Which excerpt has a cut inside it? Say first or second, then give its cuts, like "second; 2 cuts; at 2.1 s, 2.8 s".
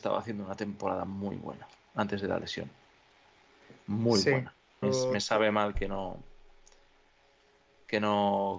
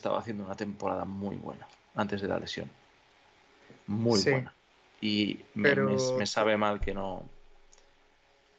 first; 1 cut; at 4.8 s